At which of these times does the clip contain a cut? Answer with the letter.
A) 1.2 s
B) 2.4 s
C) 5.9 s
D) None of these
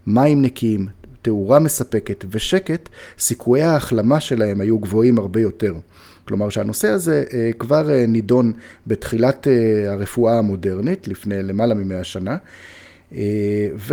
D